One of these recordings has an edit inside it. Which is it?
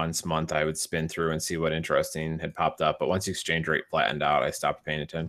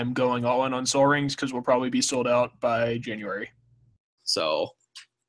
second; 1 cut; at 4.2 s

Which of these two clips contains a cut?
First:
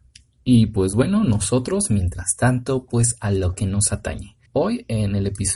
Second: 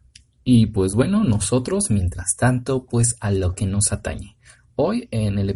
first; 1 cut; at 4.5 s

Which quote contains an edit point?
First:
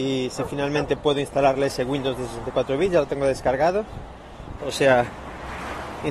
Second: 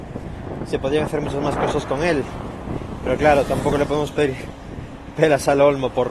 first; 1 cut; at 4.6 s

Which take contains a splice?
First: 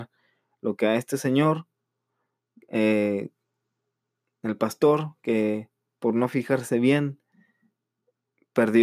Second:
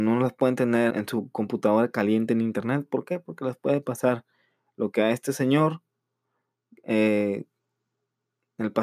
second; 1 cut; at 0.9 s

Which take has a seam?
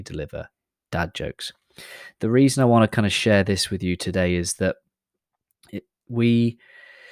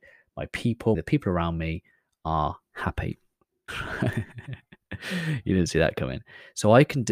second; 2 cuts; at 0.9 s, 3.7 s

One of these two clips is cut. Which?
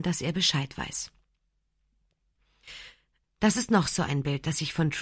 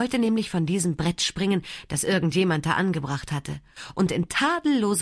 first; 1 cut; at 3.2 s

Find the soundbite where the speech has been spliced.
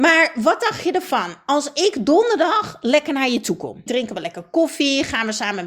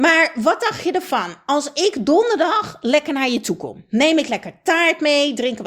first; 1 cut; at 3.9 s

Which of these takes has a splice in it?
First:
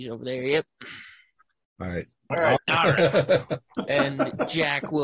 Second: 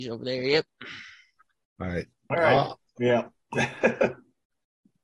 first; 1 cut; at 2.6 s

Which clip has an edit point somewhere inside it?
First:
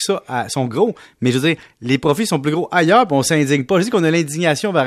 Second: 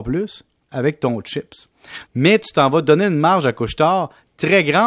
second; 1 cut; at 2.1 s

